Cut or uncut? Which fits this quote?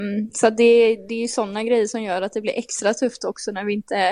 uncut